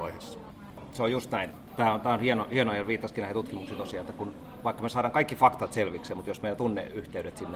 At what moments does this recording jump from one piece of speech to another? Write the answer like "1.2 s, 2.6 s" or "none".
none